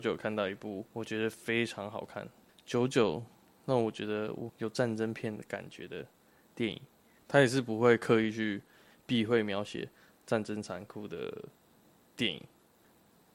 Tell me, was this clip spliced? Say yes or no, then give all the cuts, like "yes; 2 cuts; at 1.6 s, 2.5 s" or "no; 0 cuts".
yes; 2 cuts; at 4.5 s, 7.2 s